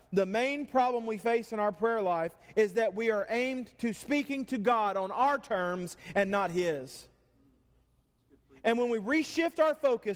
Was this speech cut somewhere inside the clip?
no; 0 cuts

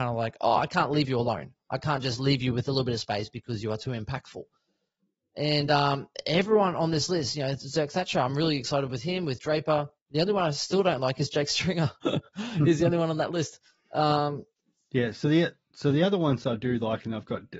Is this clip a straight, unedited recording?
yes; 0 cuts

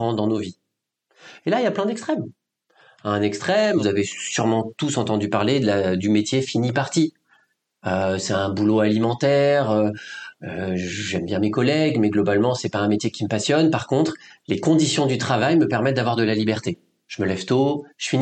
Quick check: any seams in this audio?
no; 0 cuts

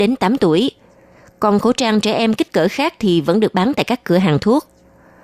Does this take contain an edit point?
no; 0 cuts

